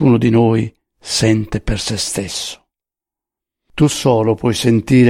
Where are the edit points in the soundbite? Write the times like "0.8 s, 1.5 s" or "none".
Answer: none